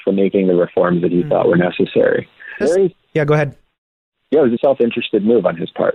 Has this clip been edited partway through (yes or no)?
yes